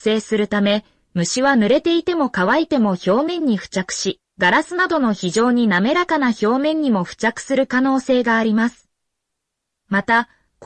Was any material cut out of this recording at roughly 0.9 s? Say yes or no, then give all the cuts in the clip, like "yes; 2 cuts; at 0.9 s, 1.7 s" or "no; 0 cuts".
no; 0 cuts